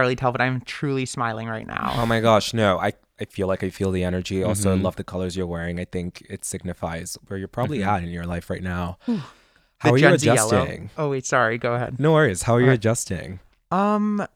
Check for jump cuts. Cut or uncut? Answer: uncut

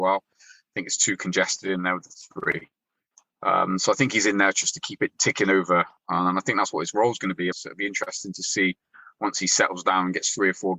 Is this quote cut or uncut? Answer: cut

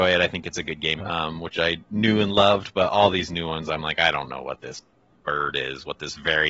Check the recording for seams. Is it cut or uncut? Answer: cut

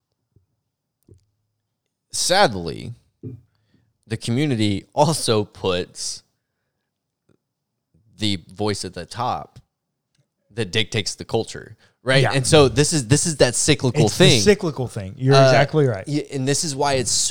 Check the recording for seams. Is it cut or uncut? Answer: uncut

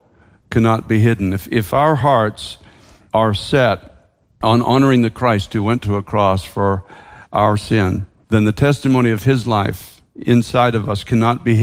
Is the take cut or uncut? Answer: uncut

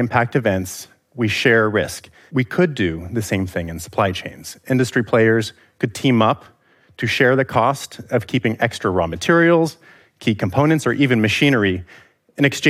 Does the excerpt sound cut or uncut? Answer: cut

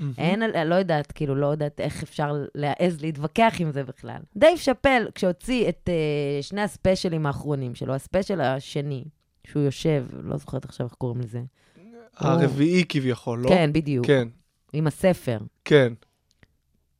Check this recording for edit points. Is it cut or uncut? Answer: cut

